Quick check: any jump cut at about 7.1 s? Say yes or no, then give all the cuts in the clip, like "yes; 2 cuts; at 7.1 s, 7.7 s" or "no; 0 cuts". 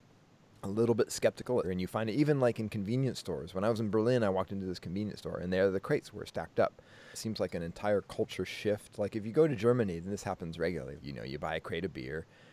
yes; 3 cuts; at 1.6 s, 7.1 s, 11.0 s